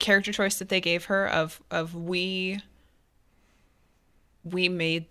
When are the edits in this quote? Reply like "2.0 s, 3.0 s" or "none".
none